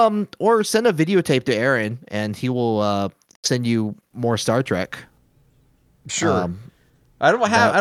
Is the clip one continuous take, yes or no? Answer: yes